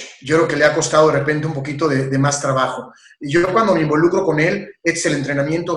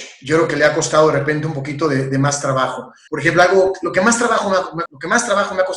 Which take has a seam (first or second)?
second